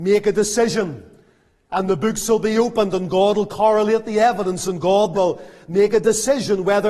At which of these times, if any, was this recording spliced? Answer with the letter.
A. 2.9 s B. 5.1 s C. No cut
B